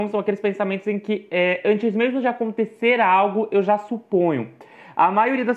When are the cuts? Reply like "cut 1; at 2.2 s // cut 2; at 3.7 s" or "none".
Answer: none

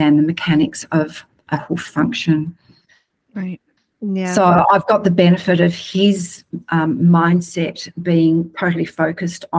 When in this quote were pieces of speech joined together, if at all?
none

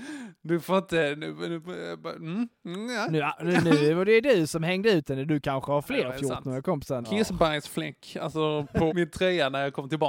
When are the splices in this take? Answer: cut 1; at 7.0 s // cut 2; at 8.9 s

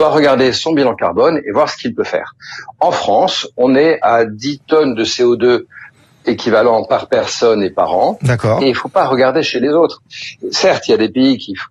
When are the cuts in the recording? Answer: cut 1; at 8.6 s

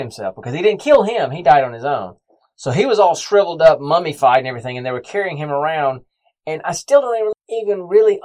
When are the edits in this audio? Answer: cut 1; at 7.3 s

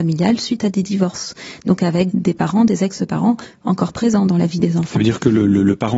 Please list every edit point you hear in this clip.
none

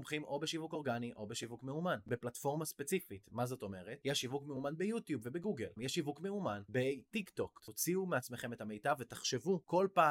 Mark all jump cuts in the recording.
cut 1; at 5.8 s // cut 2; at 7.6 s

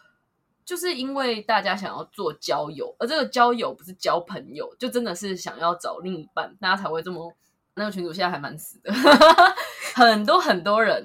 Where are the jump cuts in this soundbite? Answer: cut 1; at 7.8 s

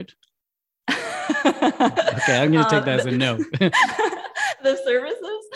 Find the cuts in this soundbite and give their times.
none

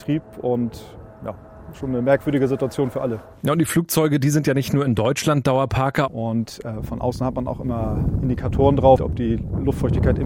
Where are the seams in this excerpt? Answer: cut 1; at 6.1 s // cut 2; at 9.0 s

